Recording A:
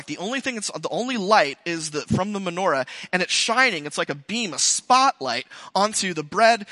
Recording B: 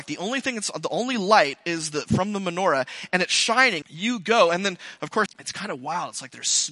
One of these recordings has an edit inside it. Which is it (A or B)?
B